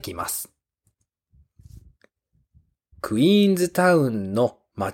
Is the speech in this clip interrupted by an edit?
yes; 1 cut; at 2.9 s

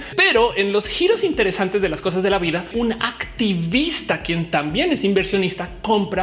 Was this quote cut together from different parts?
yes; 1 cut; at 2.7 s

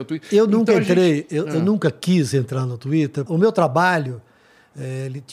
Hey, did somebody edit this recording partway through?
yes; 1 cut; at 3.3 s

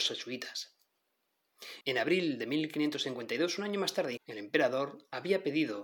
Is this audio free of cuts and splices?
no; 2 cuts; at 1.8 s, 4.2 s

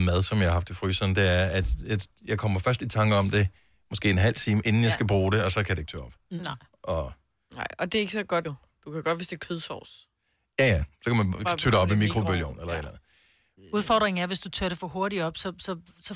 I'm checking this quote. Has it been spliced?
yes; 2 cuts; at 8.4 s, 13.6 s

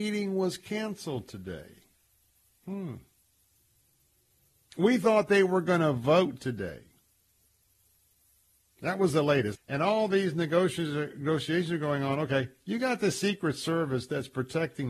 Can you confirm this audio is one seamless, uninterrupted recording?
no; 1 cut; at 9.5 s

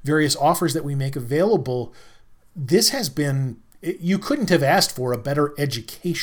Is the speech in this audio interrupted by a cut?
no; 0 cuts

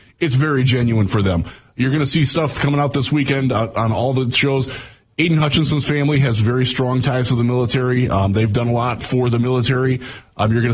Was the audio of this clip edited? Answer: no; 0 cuts

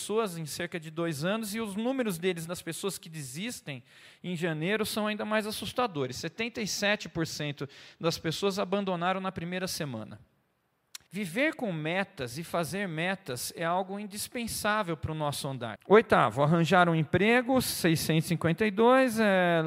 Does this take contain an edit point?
yes; 2 cuts; at 11.1 s, 15.8 s

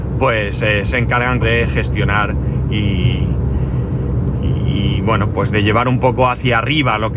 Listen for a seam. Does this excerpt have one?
yes; 1 cut; at 1.4 s

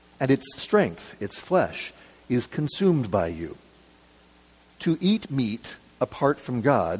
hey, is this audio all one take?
yes; 0 cuts

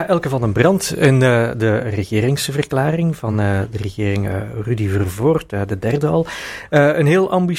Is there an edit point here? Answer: no; 0 cuts

